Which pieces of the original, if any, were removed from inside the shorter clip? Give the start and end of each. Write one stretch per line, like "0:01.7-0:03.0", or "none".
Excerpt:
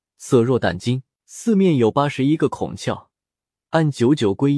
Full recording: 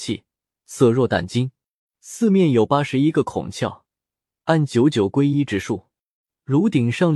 0:01.6-0:01.9